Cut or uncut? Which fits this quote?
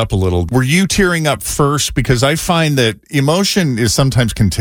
uncut